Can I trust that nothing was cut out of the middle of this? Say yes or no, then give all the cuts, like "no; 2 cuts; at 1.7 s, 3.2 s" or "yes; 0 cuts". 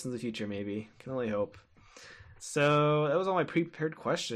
no; 1 cut; at 2.4 s